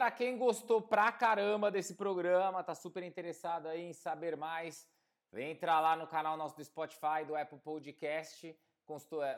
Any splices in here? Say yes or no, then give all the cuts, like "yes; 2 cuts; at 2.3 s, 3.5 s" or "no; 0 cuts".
no; 0 cuts